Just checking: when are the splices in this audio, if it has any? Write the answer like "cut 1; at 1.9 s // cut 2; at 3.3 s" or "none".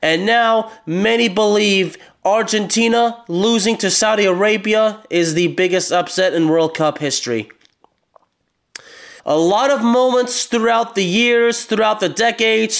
cut 1; at 9.2 s